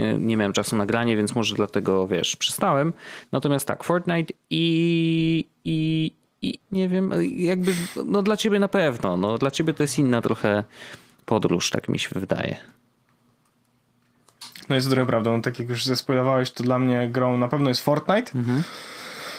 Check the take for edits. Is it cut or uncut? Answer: cut